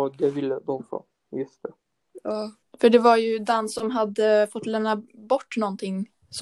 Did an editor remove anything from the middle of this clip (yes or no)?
yes